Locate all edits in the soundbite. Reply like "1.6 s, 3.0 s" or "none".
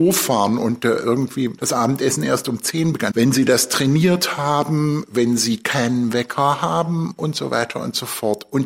1.6 s, 3.1 s

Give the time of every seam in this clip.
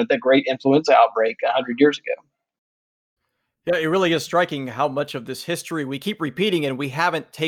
none

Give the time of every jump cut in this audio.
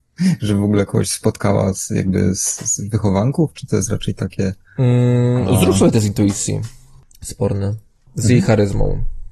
none

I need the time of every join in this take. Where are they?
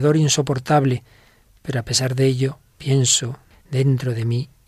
3.5 s

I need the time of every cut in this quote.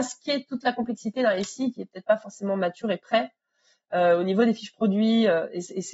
none

